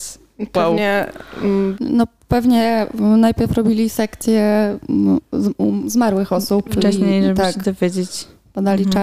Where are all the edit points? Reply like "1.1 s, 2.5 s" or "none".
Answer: 1.7 s